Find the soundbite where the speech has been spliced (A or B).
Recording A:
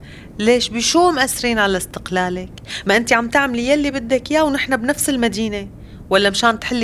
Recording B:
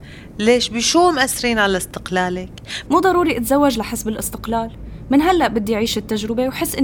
B